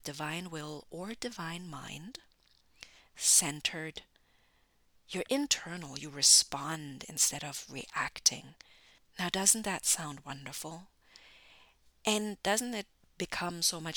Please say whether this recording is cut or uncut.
cut